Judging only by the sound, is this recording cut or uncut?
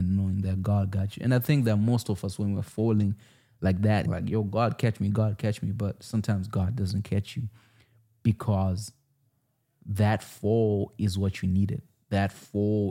cut